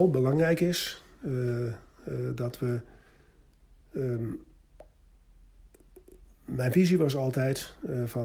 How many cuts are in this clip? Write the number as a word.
zero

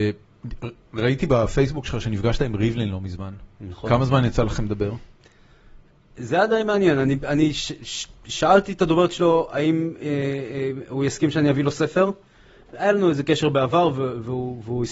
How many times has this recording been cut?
zero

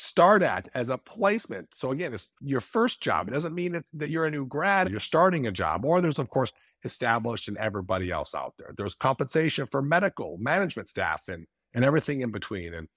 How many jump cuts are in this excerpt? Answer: one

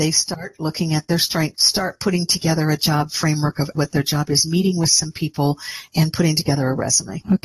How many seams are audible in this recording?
two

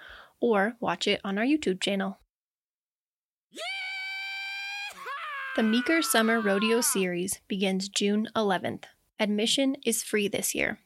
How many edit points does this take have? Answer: zero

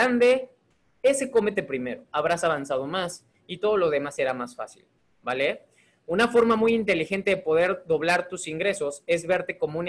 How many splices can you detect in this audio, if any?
one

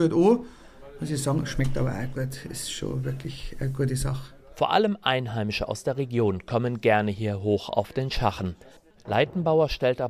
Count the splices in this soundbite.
one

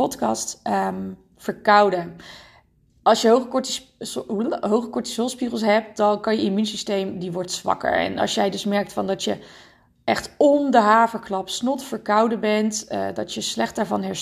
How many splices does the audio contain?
zero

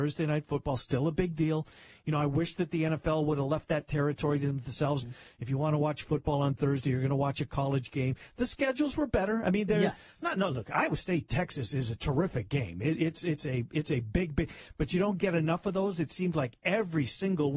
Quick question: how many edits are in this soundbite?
one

